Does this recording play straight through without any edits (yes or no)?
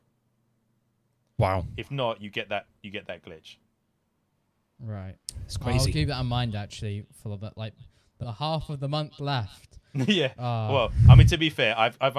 no